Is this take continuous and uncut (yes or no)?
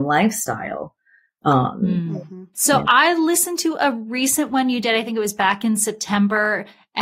no